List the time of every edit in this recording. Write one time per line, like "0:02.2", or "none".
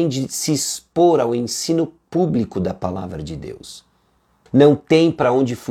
0:04.5